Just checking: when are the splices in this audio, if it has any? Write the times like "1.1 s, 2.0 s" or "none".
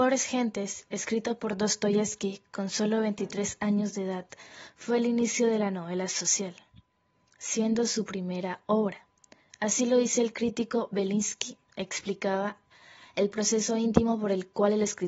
none